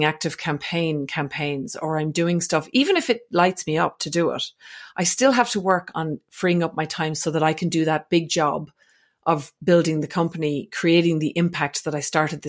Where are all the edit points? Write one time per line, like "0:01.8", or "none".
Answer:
none